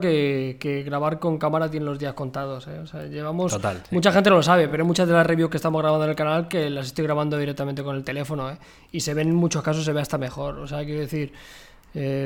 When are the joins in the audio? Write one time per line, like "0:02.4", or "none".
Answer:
none

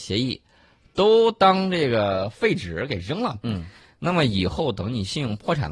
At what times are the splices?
none

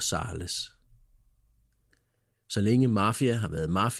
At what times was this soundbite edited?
0:02.3

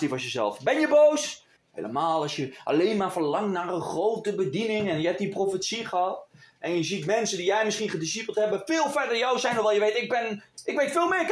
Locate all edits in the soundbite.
0:01.6

